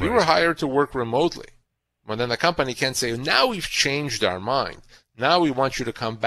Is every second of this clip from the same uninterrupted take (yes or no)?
yes